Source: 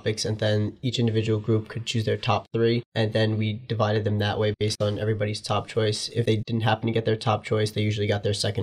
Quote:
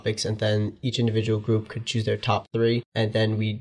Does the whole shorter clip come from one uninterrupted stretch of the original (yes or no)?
yes